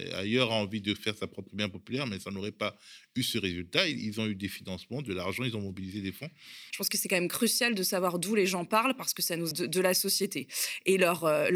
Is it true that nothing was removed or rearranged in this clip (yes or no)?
no